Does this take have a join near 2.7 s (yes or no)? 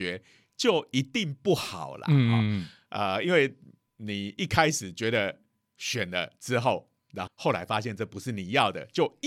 no